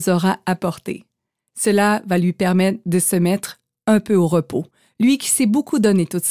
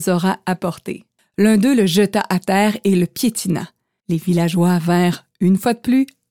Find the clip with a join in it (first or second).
second